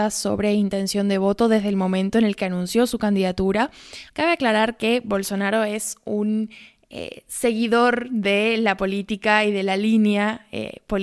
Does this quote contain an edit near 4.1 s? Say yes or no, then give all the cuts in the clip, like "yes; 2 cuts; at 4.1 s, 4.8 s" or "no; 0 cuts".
yes; 1 cut; at 4.1 s